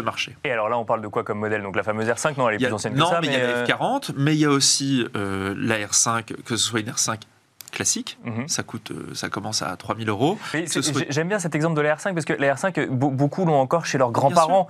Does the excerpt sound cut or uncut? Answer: uncut